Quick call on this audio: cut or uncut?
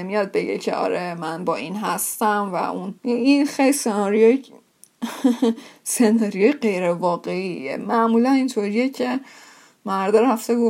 cut